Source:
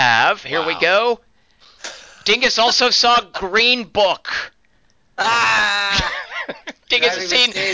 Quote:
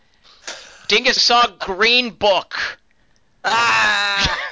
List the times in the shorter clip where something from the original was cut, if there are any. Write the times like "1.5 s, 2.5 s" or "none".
1.2 s